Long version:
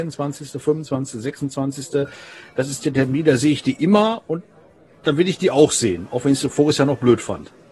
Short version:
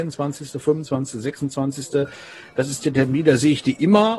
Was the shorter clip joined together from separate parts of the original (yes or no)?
no